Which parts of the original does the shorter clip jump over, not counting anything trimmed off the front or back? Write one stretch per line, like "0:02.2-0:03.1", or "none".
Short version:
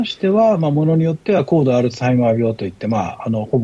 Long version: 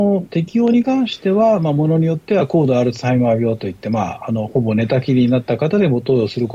none